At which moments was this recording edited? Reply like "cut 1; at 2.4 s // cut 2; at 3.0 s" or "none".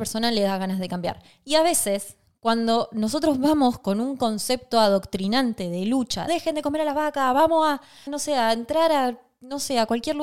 cut 1; at 6.3 s // cut 2; at 8.1 s